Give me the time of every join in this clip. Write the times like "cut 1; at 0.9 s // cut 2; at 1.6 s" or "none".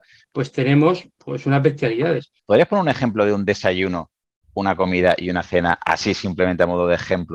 cut 1; at 2.4 s

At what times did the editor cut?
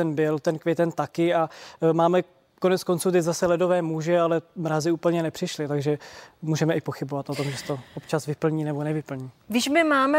none

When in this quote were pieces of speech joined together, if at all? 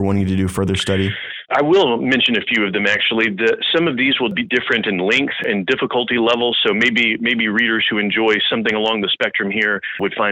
none

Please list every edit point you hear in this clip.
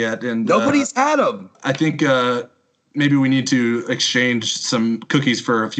cut 1; at 1.5 s

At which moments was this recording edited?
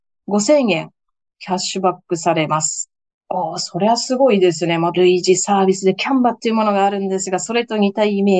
cut 1; at 4.9 s

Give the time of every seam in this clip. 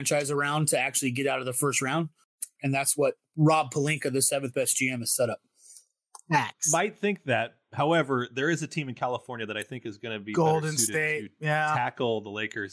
cut 1; at 2.6 s

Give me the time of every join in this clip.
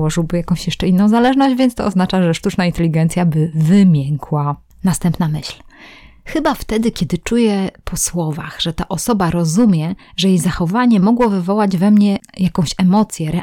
none

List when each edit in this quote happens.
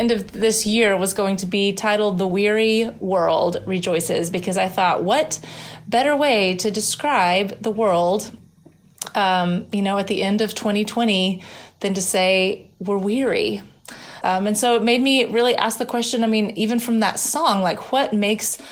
cut 1; at 14.2 s

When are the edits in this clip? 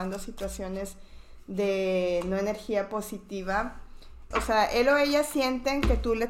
cut 1; at 4.3 s

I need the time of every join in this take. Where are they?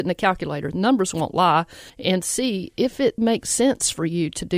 cut 1; at 1.9 s // cut 2; at 3.2 s

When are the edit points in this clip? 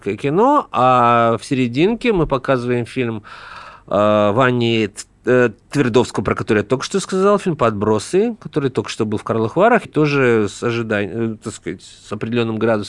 cut 1; at 5.6 s // cut 2; at 9.9 s

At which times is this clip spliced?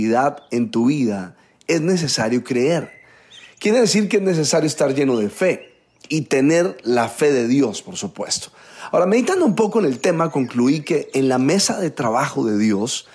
none

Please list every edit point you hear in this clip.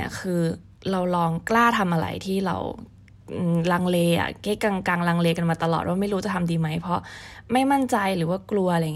cut 1; at 4.6 s

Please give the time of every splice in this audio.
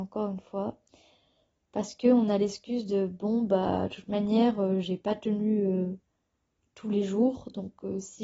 none

